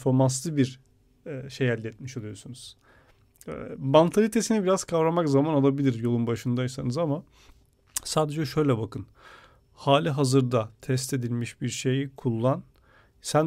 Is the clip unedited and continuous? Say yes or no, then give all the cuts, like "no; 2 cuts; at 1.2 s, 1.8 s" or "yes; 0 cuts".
yes; 0 cuts